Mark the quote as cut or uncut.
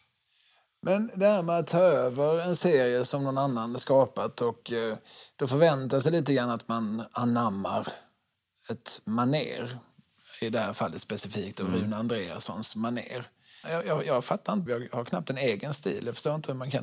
cut